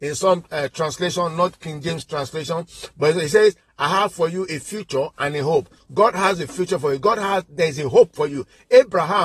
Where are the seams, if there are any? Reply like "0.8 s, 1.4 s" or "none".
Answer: 5.8 s